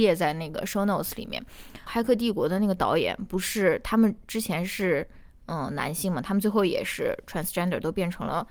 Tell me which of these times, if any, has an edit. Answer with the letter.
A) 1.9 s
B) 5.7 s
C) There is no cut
A